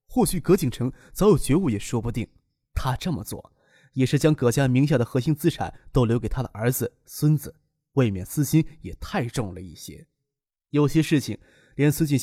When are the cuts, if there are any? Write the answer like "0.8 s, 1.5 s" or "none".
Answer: none